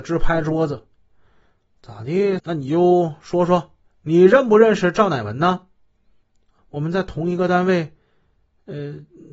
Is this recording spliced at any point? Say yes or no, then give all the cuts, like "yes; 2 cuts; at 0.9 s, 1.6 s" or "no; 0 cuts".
yes; 2 cuts; at 2.4 s, 6.6 s